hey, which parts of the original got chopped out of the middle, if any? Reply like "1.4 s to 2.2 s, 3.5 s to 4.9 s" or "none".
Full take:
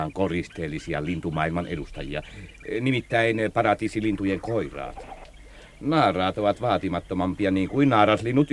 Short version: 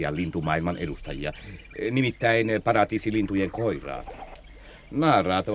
none